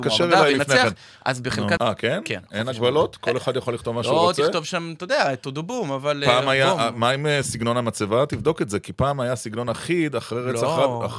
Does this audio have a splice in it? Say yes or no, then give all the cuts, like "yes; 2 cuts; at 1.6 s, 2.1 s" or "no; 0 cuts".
yes; 1 cut; at 1.8 s